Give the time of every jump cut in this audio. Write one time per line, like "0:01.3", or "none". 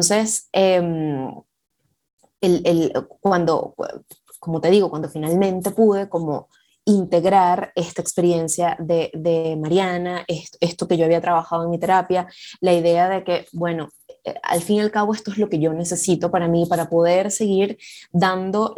none